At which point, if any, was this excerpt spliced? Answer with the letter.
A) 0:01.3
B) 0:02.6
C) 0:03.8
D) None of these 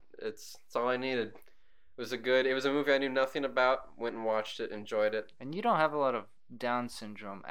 D